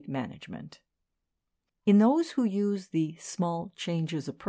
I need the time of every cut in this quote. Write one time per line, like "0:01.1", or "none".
0:01.7